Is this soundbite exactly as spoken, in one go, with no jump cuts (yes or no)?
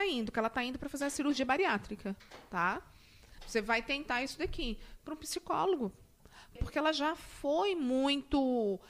no